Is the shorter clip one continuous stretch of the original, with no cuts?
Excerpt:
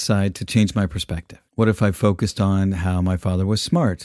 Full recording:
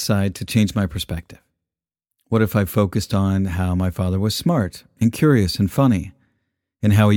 no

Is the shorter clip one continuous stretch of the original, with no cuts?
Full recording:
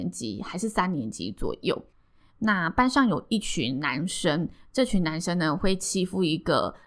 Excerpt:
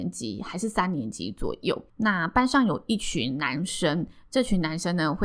no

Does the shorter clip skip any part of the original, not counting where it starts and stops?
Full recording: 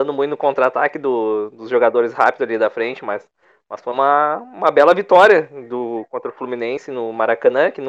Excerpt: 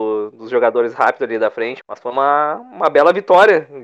yes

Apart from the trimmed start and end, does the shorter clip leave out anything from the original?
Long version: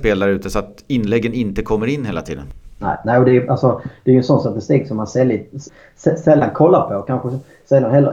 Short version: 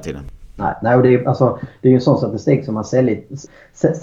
no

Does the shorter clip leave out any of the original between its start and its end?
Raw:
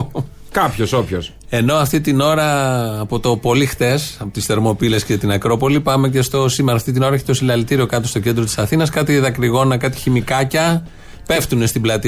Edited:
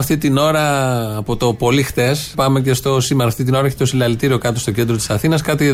yes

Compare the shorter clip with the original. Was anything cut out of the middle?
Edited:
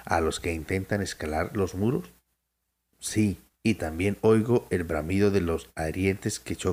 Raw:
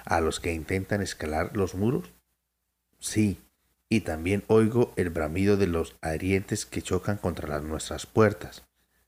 yes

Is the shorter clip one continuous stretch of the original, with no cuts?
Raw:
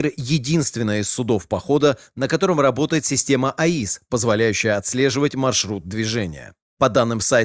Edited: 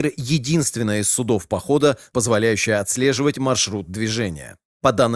no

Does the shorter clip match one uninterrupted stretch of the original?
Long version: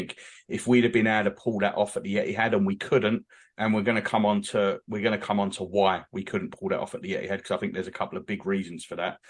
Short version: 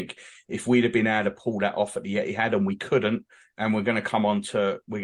yes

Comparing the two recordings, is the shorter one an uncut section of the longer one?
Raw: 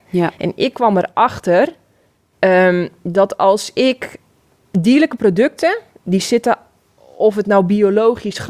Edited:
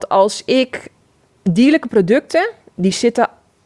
yes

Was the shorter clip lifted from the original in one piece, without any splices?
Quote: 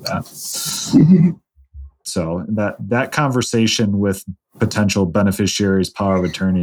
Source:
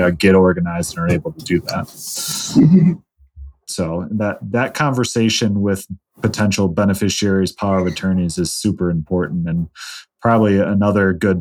yes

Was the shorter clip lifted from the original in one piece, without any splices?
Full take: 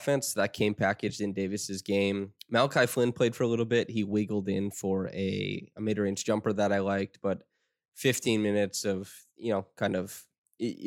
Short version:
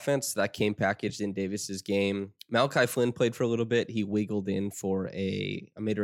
yes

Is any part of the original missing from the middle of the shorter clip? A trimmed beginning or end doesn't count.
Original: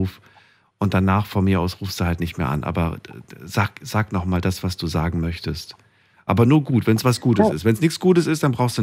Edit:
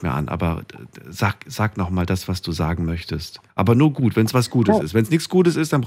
yes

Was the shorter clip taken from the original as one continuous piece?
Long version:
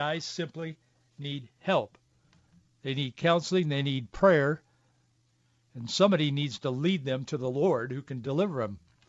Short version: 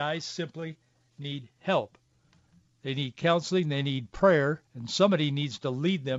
no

